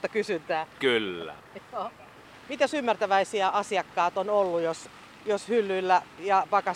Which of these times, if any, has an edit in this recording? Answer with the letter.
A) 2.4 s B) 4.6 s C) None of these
C